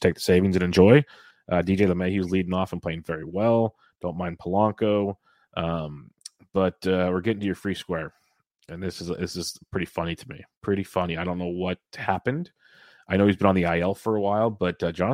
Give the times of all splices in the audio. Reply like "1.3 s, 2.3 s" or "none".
1.3 s